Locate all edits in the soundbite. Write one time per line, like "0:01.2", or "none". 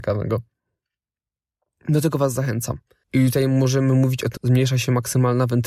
0:03.0
0:04.4